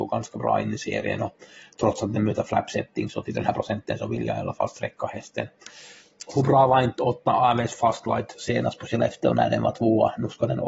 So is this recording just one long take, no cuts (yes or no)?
yes